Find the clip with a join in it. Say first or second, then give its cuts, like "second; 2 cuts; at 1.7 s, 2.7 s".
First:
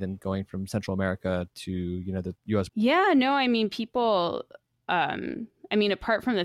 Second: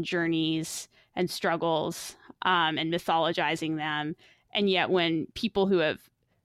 first; 1 cut; at 2.7 s